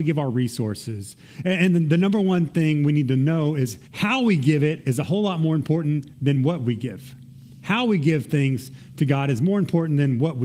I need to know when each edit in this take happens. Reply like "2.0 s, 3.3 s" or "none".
3.8 s